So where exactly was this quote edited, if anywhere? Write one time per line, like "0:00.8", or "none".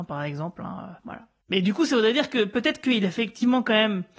0:01.0